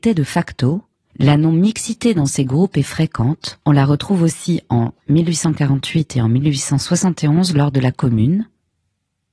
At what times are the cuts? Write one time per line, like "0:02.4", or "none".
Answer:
0:01.1
0:03.6